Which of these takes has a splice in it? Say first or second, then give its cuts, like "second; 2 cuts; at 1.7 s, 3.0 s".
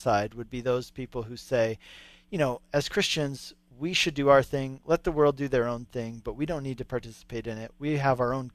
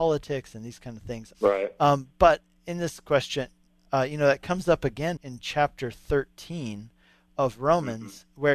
second; 2 cuts; at 1.3 s, 5.2 s